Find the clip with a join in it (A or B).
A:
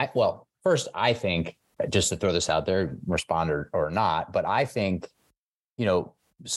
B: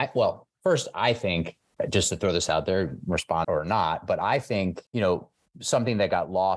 B